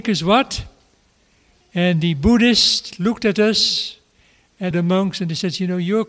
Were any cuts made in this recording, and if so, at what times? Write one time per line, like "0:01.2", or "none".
0:01.6
0:04.7